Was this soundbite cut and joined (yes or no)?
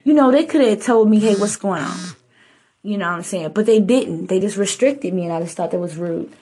no